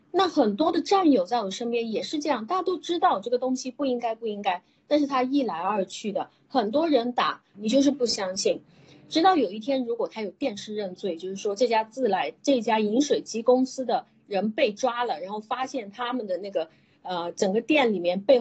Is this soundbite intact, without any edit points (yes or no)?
no